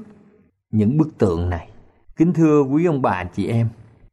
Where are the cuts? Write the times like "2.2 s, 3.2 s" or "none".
2.1 s